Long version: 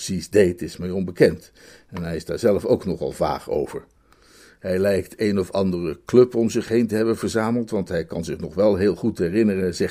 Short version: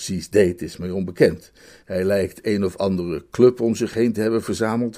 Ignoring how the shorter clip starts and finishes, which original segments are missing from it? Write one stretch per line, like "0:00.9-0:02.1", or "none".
0:01.8-0:04.6

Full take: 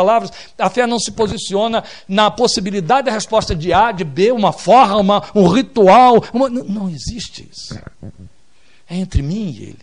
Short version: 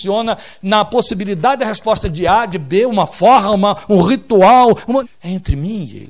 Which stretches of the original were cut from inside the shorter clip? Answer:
0:06.5-0:08.7

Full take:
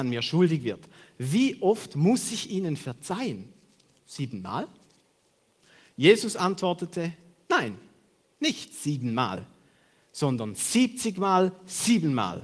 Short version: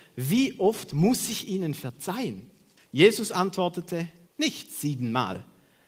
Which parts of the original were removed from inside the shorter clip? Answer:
0:03.8-0:05.8
0:07.3-0:08.3

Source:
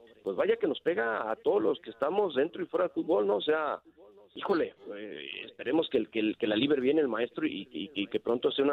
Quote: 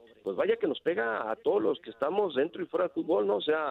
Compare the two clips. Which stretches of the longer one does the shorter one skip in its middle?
none

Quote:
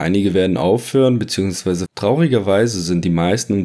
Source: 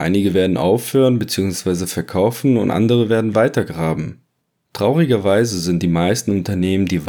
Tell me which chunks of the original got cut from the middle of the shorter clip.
0:01.9-0:04.6

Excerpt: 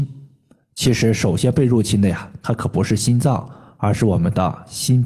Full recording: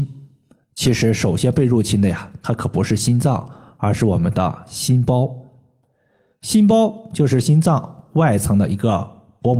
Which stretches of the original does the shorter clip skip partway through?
none

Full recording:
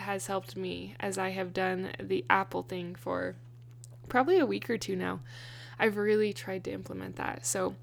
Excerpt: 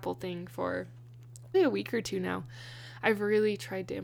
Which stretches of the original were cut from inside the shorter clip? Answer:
0:04.0-0:04.3

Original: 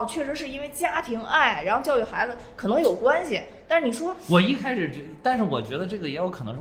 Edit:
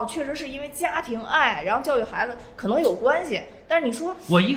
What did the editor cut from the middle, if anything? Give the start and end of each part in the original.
none

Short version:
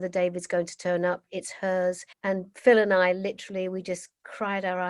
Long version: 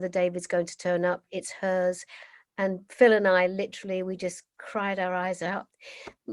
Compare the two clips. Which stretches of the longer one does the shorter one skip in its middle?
0:02.1-0:02.5

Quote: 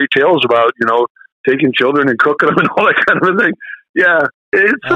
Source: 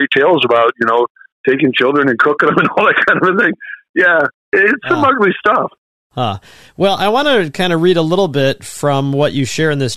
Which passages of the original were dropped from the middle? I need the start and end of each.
none

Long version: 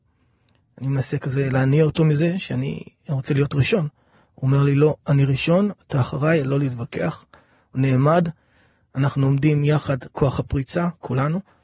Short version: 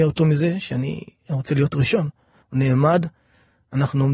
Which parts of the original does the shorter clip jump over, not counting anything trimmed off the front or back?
0:04.2-0:07.6

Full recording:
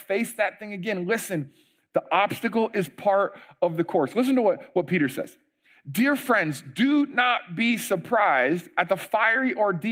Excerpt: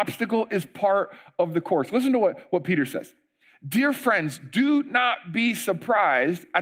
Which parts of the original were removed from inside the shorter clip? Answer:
none

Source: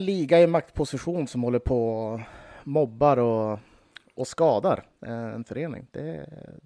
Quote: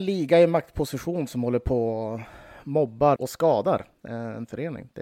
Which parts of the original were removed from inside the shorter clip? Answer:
0:03.2-0:04.1

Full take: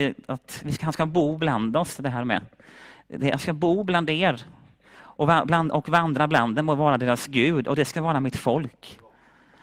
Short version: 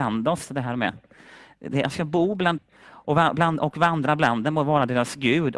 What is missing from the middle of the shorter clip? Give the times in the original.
0:04.1-0:04.7

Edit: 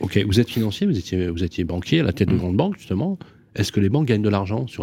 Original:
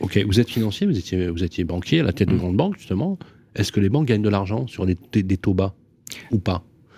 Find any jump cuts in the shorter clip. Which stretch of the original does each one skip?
none

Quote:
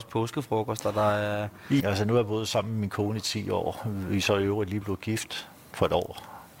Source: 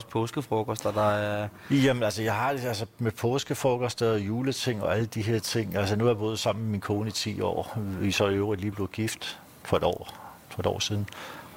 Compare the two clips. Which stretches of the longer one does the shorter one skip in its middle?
0:01.8-0:05.7

